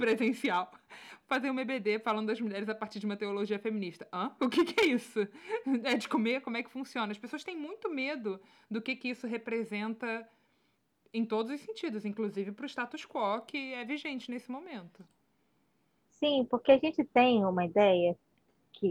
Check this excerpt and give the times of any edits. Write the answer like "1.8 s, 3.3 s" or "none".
4.4 s